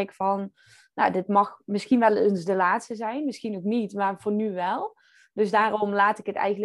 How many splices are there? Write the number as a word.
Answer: zero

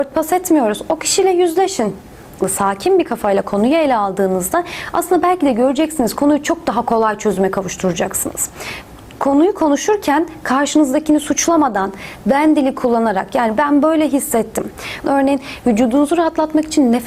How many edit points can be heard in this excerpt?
two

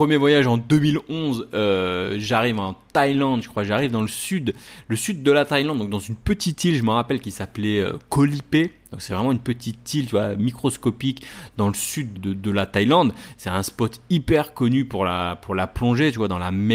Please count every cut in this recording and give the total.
one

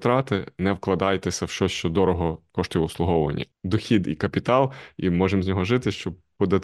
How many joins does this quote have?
one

